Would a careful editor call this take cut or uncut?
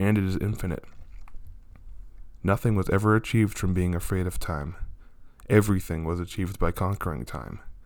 cut